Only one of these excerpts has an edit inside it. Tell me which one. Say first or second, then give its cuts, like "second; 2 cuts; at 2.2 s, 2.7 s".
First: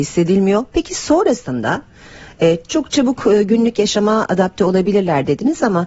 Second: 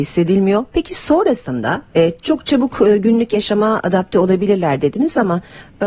second; 1 cut; at 1.9 s